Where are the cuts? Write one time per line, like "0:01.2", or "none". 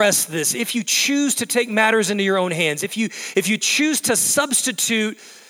none